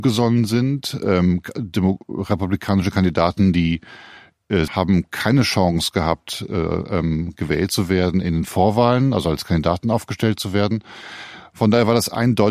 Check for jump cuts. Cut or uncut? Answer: cut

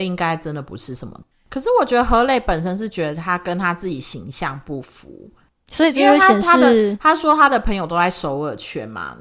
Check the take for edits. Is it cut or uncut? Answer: cut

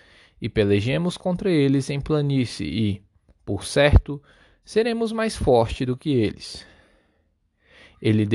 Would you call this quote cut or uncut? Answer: uncut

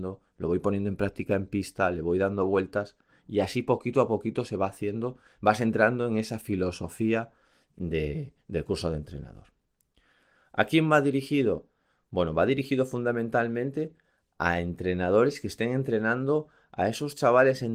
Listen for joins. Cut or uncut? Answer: uncut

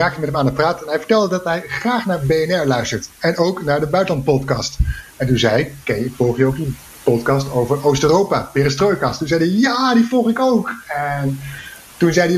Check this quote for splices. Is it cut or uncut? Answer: uncut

